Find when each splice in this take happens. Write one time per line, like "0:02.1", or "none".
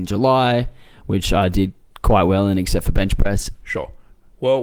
0:03.5